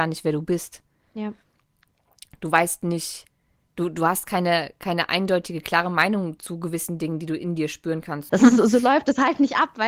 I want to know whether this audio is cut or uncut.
cut